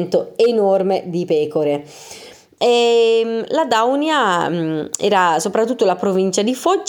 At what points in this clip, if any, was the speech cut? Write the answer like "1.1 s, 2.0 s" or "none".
2.6 s